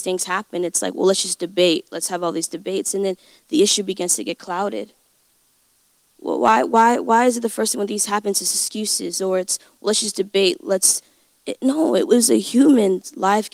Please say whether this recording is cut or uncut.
uncut